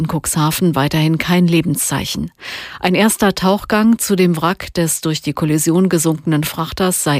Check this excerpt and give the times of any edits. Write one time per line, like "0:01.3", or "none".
none

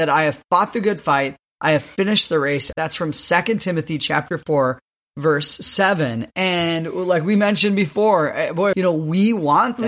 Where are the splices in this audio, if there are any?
0:02.7
0:08.7

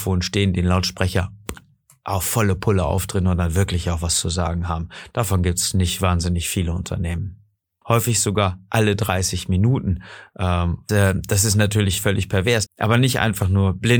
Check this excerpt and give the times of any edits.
0:07.8
0:10.9
0:12.7

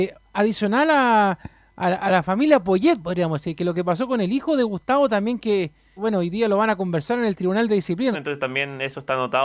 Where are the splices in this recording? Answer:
0:06.0
0:08.1

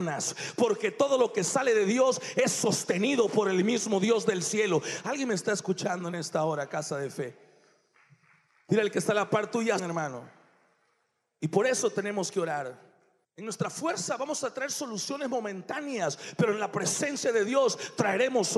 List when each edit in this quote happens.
0:09.8
0:13.2

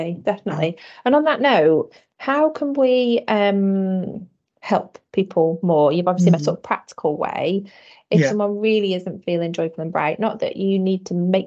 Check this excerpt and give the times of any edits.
0:06.3

